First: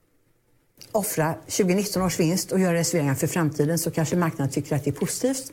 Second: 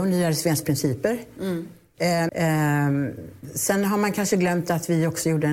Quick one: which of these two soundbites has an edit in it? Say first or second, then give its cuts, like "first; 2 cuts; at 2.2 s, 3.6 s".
second; 1 cut; at 2.3 s